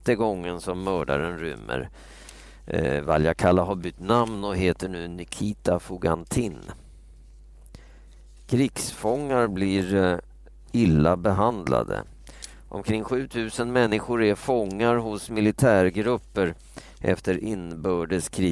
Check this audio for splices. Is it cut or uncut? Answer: uncut